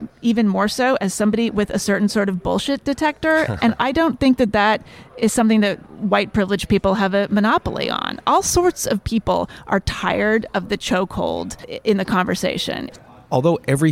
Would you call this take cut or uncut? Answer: uncut